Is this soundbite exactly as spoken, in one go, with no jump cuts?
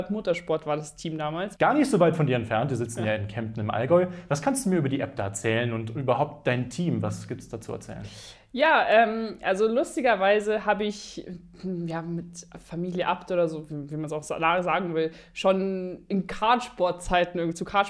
no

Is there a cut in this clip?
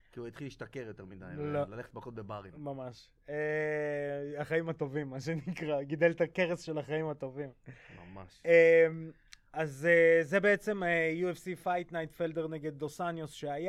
no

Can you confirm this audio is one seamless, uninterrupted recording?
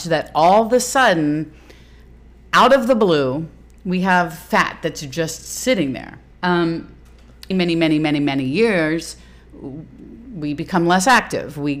no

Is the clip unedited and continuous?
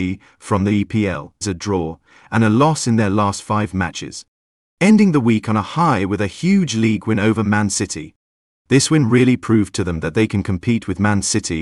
no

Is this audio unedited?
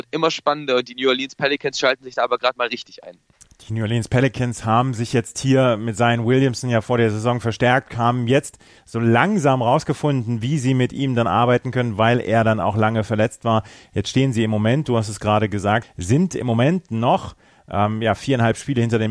no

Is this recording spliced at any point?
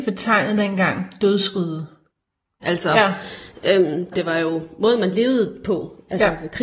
yes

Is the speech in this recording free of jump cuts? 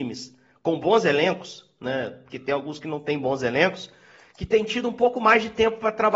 yes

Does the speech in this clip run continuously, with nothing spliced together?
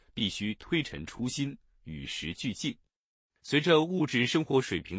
no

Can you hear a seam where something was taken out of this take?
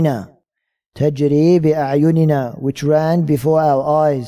no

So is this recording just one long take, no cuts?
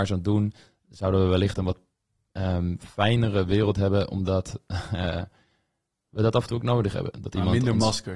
yes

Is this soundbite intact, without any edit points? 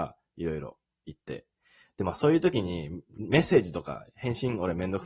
yes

